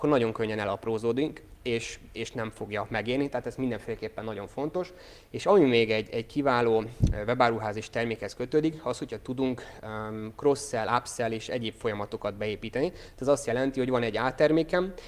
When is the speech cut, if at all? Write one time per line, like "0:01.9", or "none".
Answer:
none